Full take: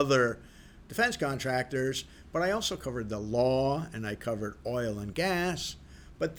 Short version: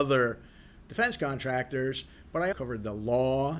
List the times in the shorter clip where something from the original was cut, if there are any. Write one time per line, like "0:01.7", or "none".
0:02.5